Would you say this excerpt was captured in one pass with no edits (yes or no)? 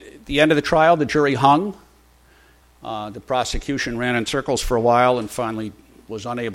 no